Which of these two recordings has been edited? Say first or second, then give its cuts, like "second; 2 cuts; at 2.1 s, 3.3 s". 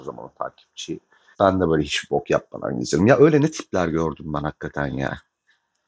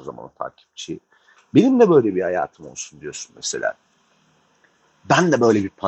first; 1 cut; at 1.3 s